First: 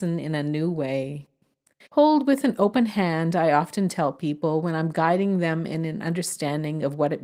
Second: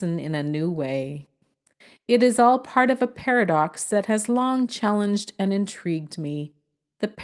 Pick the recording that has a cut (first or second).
first